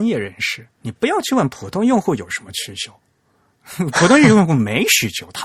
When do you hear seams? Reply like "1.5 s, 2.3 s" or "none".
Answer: none